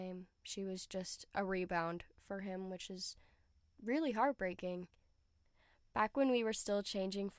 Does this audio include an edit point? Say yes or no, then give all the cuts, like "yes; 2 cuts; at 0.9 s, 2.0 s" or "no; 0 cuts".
no; 0 cuts